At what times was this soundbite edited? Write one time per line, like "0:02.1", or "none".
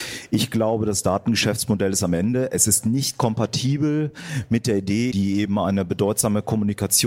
0:05.1